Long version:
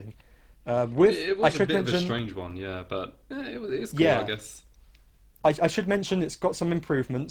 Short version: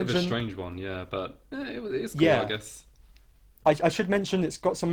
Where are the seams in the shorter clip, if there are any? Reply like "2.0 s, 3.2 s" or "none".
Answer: none